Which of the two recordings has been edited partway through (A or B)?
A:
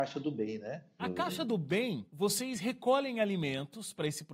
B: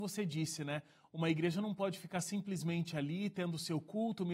A